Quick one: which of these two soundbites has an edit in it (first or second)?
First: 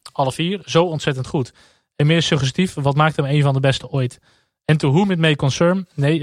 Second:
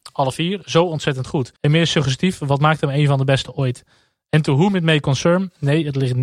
second